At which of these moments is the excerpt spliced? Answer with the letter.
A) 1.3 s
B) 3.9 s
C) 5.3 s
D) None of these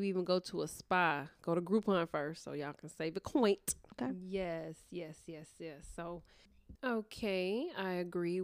B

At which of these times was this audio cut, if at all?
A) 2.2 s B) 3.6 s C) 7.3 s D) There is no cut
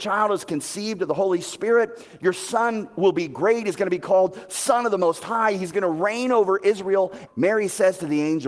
C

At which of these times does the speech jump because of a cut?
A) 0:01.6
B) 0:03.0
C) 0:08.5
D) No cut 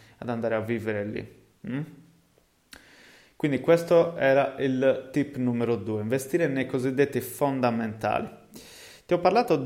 D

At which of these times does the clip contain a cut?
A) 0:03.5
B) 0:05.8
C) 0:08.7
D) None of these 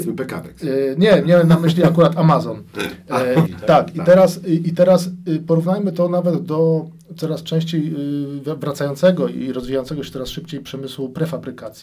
A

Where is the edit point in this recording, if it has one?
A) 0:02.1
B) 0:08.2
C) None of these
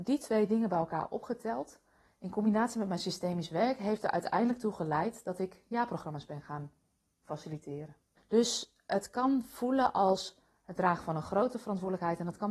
B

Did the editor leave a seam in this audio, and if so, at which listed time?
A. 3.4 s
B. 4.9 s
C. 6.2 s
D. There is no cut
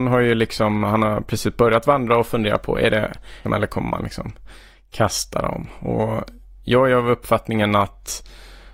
A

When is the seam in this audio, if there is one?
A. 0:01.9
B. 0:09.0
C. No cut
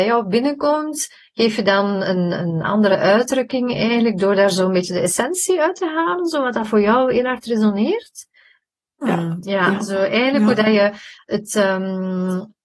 B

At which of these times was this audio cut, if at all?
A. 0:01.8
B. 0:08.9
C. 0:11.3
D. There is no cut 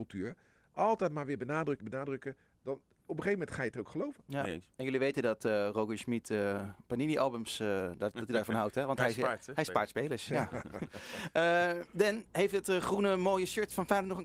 A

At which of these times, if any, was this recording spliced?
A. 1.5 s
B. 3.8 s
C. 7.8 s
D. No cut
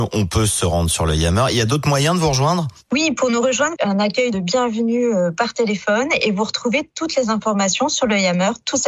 B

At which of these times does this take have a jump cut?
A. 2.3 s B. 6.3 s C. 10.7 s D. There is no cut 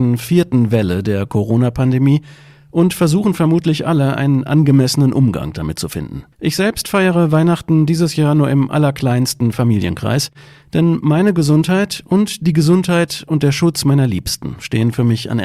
B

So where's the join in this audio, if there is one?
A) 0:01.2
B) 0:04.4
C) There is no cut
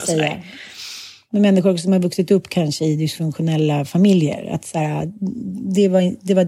C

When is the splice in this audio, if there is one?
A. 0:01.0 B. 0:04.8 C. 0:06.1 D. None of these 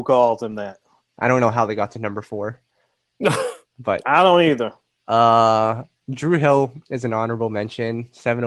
A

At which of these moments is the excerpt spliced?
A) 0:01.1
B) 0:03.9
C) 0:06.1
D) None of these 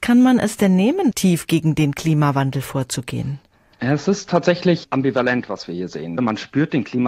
A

